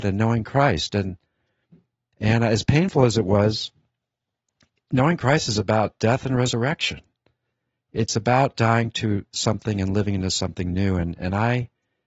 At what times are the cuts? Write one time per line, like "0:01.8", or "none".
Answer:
none